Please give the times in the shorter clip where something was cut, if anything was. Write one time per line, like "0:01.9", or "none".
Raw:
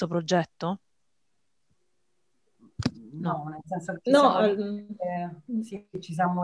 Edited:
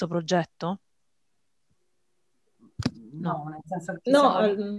none